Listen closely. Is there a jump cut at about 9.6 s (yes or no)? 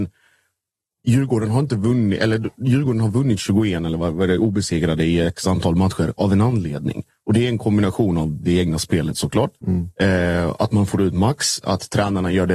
yes